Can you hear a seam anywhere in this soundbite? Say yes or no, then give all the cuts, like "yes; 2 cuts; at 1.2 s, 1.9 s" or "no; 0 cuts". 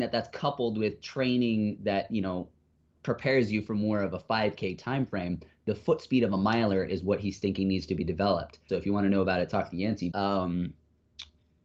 yes; 2 cuts; at 8.7 s, 10.1 s